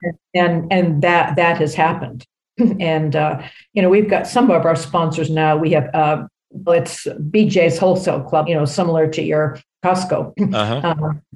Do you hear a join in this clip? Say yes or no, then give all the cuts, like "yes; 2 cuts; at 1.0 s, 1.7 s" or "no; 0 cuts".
yes; 2 cuts; at 6.7 s, 8.5 s